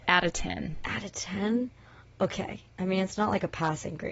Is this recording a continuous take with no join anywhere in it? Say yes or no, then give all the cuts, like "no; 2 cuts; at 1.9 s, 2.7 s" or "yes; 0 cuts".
no; 1 cut; at 2.7 s